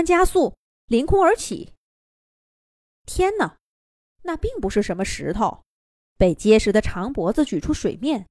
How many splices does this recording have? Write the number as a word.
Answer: one